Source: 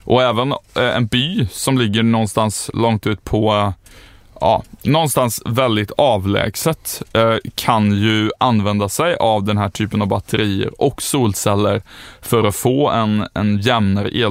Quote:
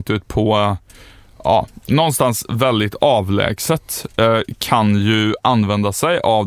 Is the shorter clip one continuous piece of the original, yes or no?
yes